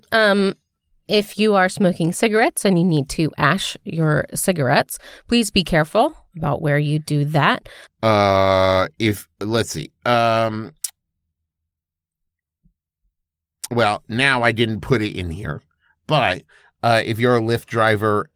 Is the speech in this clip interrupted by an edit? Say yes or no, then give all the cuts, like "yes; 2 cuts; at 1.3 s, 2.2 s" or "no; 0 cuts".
yes; 1 cut; at 7.9 s